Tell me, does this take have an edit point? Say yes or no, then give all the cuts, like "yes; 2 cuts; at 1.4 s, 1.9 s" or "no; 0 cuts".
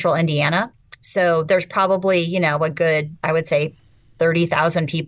no; 0 cuts